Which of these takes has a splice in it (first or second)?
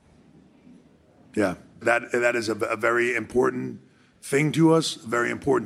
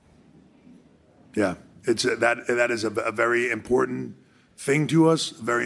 first